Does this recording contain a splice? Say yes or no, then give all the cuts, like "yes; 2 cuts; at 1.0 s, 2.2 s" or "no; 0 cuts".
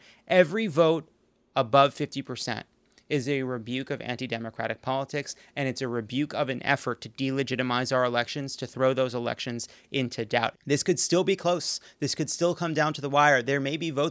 yes; 1 cut; at 10.5 s